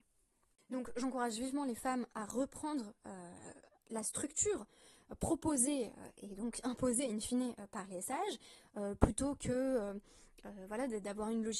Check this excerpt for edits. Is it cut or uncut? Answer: cut